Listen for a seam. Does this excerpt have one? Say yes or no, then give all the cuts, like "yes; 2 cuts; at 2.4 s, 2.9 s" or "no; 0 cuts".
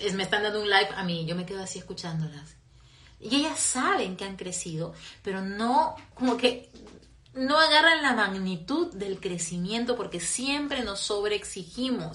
yes; 1 cut; at 6.1 s